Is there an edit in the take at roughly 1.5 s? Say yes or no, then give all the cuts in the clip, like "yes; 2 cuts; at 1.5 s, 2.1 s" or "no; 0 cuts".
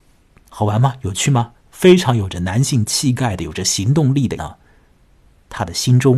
yes; 2 cuts; at 1.5 s, 4.4 s